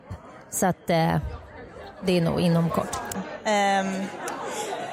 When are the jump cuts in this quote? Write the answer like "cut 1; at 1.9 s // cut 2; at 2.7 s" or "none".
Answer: cut 1; at 3.1 s